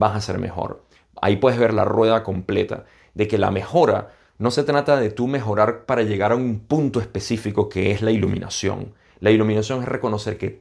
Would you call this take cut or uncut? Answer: uncut